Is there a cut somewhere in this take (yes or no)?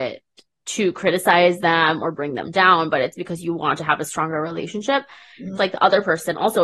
yes